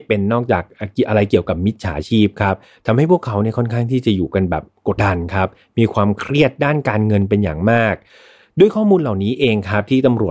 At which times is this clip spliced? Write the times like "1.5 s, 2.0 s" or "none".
5.0 s